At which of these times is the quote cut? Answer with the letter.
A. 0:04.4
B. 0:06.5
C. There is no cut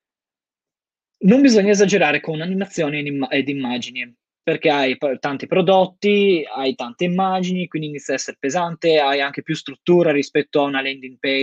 A